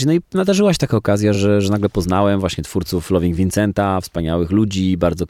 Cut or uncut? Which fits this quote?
uncut